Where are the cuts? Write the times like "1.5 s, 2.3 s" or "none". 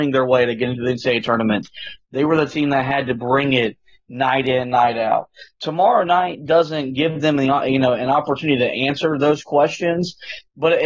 5.5 s